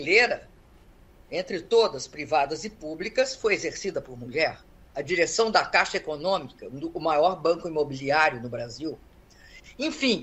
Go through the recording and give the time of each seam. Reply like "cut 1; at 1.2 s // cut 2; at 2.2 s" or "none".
none